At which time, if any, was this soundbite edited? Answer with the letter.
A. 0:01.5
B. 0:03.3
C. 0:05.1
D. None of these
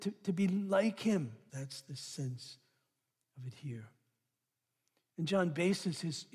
A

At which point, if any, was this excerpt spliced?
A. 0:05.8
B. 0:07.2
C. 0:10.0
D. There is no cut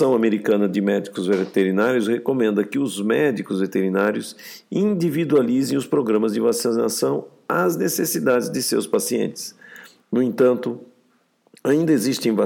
C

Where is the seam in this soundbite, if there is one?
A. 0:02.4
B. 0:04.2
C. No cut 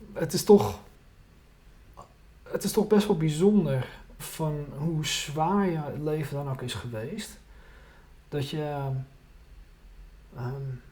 B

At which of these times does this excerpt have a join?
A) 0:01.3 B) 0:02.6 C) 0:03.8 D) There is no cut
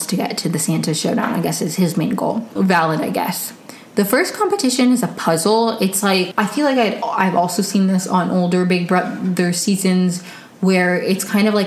B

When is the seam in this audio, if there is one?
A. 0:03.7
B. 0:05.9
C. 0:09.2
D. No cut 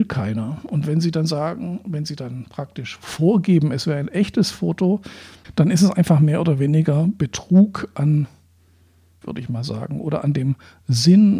C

